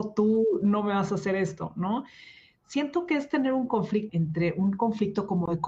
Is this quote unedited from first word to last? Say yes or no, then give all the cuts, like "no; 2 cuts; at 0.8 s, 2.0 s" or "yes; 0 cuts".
no; 1 cut; at 4.1 s